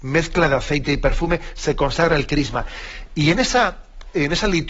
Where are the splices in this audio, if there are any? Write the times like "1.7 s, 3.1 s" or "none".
none